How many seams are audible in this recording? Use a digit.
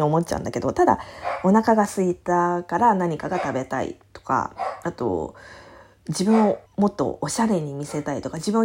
1